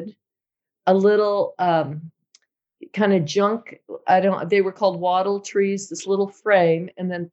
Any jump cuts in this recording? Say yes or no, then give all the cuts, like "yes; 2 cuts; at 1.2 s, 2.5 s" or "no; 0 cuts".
no; 0 cuts